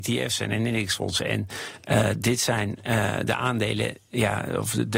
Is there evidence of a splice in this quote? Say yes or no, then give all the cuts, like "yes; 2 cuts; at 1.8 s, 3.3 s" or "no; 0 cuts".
no; 0 cuts